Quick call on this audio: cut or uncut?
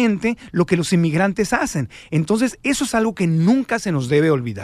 uncut